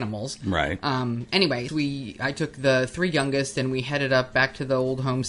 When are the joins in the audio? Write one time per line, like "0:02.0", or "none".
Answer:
0:01.7